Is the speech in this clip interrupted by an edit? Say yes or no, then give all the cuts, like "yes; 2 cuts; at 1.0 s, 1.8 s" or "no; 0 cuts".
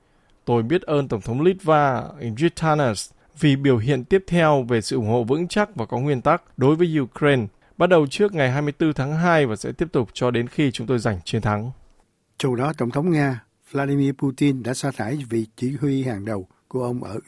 no; 0 cuts